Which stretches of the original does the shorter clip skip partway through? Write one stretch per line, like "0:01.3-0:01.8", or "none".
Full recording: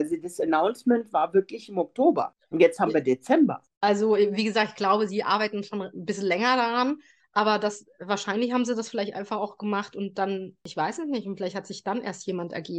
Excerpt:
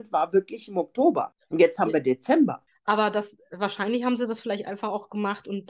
0:03.7-0:07.2